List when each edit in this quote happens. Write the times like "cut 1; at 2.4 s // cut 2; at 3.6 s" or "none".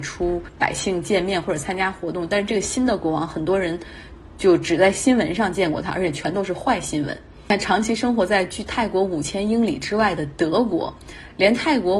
none